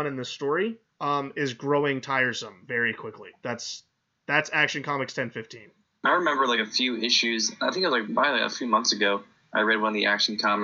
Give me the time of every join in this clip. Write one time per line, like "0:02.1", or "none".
0:08.1